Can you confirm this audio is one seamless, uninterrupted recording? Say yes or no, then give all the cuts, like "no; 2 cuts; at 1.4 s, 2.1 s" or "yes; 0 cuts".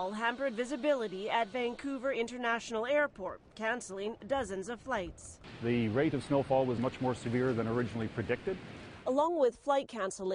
no; 1 cut; at 6.8 s